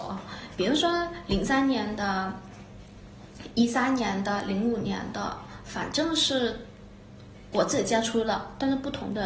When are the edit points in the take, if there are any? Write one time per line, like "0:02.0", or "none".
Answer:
none